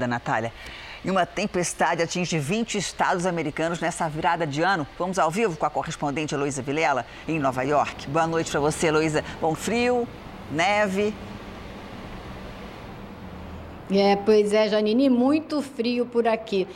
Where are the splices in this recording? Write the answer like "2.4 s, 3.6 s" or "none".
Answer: 9.5 s